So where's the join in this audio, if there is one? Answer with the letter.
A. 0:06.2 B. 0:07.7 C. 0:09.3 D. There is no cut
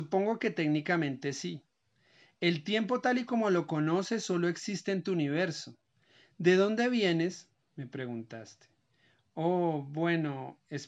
A